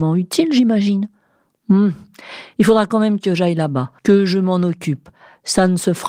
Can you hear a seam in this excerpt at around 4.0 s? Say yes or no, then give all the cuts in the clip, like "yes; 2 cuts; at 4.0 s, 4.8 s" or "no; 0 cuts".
yes; 1 cut; at 4.0 s